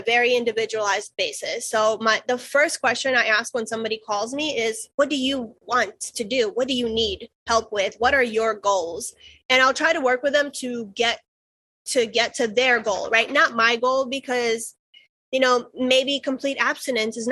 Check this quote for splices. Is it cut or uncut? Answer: uncut